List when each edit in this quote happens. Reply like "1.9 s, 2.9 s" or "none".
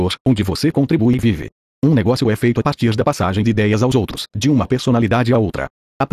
none